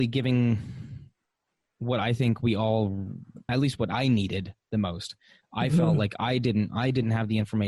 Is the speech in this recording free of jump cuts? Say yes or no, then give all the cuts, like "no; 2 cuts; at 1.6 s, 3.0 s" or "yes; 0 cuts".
no; 1 cut; at 3.5 s